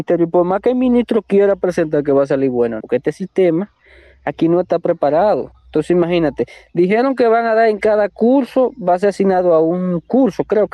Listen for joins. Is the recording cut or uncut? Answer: cut